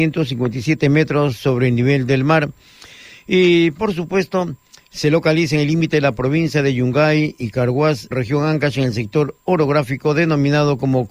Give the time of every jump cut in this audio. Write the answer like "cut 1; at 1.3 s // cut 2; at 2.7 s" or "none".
cut 1; at 8.1 s